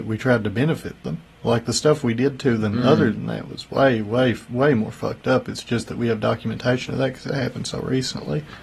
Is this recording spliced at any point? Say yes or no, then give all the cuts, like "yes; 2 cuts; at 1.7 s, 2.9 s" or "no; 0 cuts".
no; 0 cuts